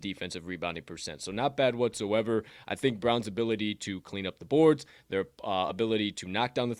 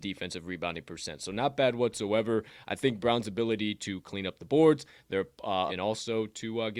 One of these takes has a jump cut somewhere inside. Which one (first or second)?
second